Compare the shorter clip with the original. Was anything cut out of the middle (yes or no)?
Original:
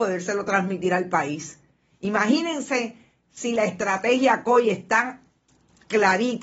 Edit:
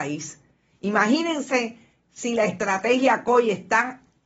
no